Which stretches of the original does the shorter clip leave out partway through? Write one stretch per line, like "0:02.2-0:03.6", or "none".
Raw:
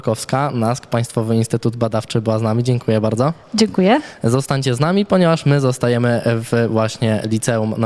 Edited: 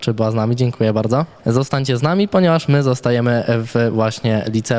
0:03.5-0:04.2